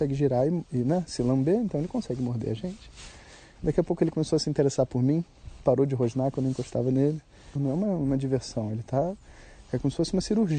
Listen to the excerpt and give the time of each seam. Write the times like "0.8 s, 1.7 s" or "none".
3.6 s, 7.6 s

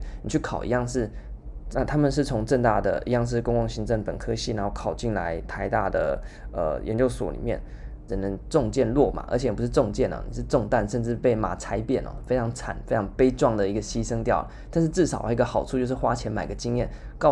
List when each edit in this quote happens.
1.7 s, 8.1 s, 13.2 s

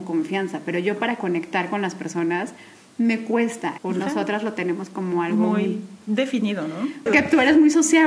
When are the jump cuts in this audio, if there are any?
3.8 s, 5.6 s, 7.1 s

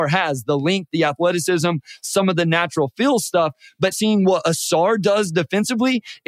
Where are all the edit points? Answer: 3.9 s

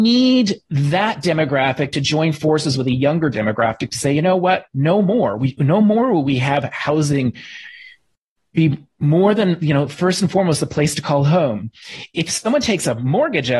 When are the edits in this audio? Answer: none

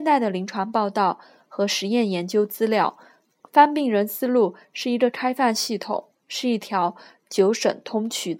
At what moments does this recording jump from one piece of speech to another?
3.4 s, 6.2 s

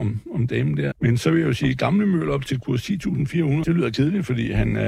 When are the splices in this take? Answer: 0.9 s, 3.6 s

